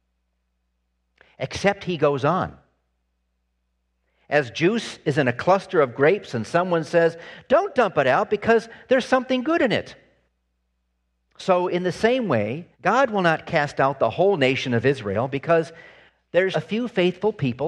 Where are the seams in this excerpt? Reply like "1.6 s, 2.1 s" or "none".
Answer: 11.3 s, 12.7 s, 16.5 s

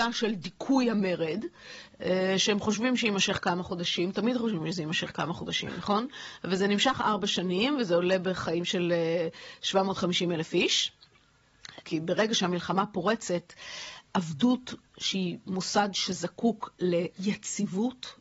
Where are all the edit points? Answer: 11.8 s

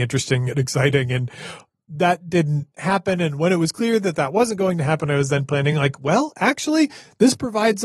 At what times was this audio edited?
none

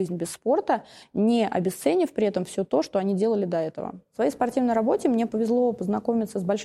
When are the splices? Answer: none

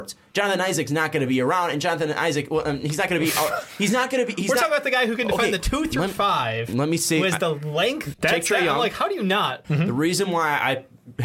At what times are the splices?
8.1 s, 9.6 s

